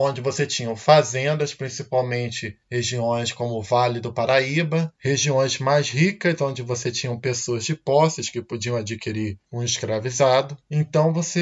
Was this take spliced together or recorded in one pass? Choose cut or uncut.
cut